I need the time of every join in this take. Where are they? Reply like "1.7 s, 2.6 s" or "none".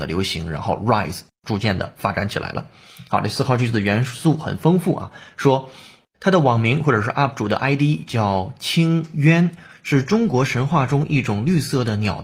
none